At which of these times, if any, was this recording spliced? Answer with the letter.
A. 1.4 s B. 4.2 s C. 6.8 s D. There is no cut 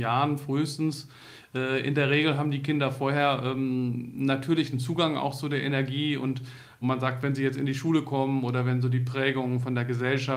C